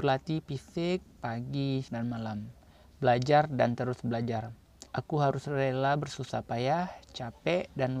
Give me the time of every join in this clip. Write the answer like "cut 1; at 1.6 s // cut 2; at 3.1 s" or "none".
cut 1; at 1.9 s // cut 2; at 4.9 s